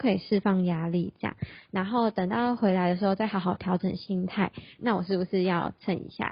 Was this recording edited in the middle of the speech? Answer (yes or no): yes